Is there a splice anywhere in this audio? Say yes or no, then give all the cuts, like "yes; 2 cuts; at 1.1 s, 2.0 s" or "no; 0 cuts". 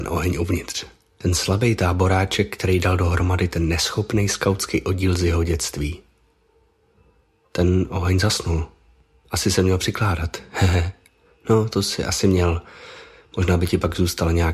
no; 0 cuts